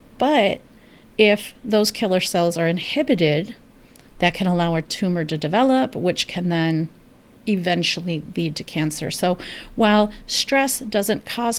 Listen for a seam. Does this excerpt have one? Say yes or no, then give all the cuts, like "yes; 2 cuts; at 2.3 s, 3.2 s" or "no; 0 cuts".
yes; 1 cut; at 4.1 s